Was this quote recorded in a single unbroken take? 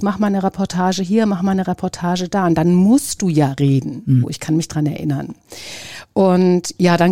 no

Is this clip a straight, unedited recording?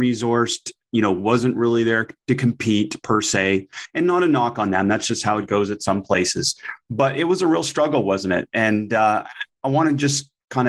yes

